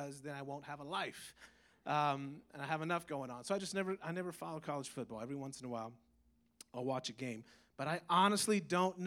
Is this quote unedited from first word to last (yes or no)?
yes